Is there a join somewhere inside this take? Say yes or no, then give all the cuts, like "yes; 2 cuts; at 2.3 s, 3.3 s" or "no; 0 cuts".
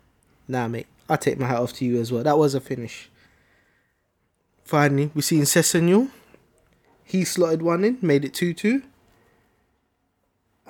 no; 0 cuts